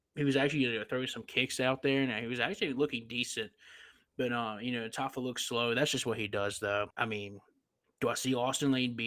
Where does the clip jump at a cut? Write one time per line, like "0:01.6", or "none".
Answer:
0:06.9